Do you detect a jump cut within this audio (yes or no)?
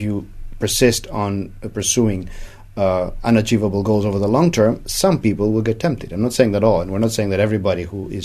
no